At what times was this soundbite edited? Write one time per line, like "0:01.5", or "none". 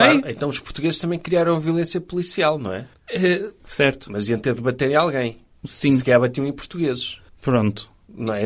0:03.6